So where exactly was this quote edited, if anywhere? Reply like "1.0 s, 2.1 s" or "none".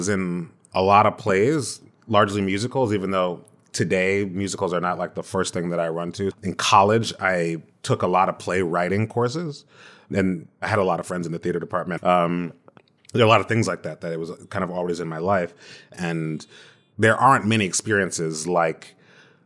6.3 s, 12.0 s

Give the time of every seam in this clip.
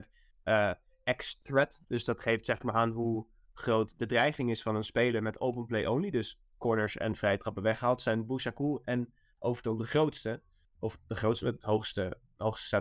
none

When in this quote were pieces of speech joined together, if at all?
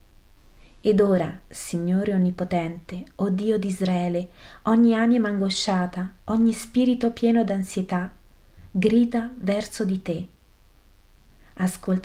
none

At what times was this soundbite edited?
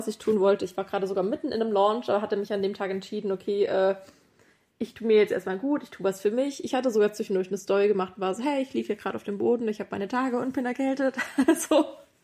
none

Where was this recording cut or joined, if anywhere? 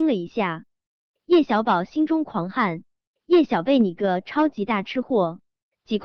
none

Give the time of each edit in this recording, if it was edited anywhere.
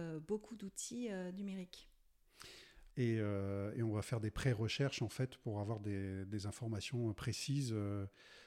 2.9 s

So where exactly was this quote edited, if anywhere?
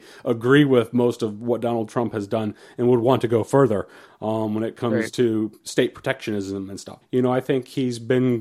7.0 s

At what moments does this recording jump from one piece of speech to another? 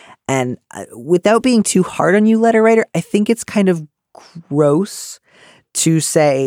none

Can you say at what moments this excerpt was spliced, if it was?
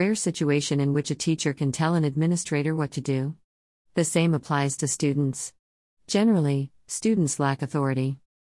none

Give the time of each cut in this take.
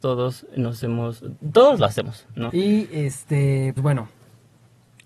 2.5 s, 3.8 s

